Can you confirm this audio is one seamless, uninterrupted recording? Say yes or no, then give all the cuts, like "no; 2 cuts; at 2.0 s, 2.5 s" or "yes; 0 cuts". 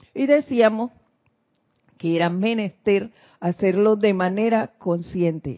yes; 0 cuts